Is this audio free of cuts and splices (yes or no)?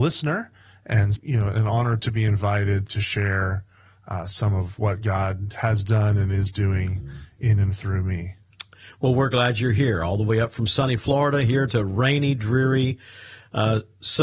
no